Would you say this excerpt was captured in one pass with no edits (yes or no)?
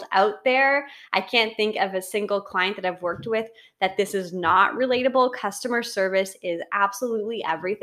yes